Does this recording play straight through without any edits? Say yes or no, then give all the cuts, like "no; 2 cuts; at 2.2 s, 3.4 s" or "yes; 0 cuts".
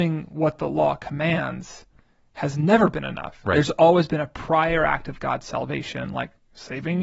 yes; 0 cuts